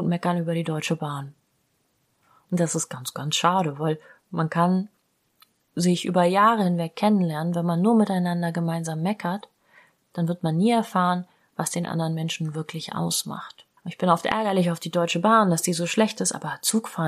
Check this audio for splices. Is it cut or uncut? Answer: cut